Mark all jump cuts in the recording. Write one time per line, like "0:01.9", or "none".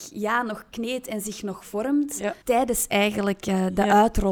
0:02.4